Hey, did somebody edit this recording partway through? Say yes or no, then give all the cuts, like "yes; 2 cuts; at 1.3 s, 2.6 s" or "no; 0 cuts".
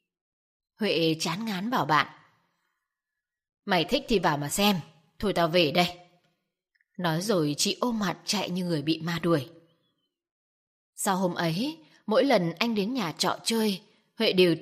no; 0 cuts